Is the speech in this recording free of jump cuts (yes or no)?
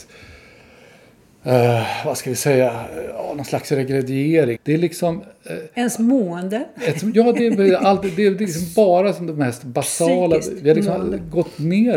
no